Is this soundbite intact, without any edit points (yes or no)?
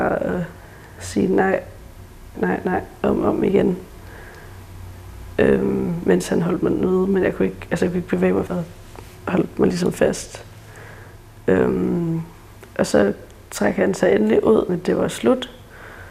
no